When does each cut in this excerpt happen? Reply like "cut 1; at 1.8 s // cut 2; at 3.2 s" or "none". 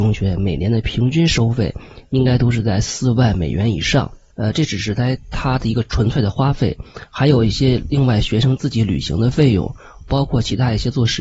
cut 1; at 4.3 s